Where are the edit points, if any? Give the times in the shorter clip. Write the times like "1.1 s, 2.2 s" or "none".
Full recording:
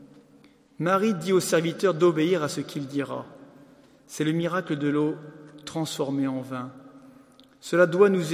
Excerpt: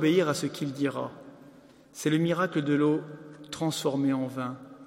none